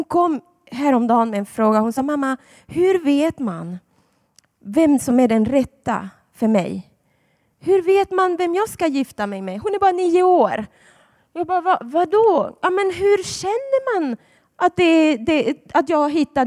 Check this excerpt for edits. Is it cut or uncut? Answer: uncut